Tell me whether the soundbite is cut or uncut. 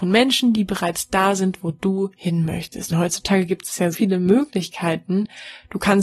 cut